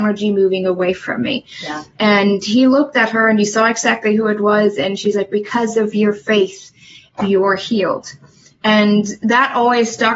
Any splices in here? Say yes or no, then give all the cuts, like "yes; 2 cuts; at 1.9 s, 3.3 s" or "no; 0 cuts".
no; 0 cuts